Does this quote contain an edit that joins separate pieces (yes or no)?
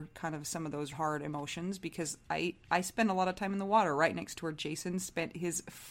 yes